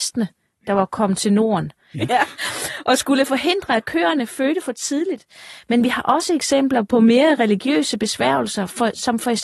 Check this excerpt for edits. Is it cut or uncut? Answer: cut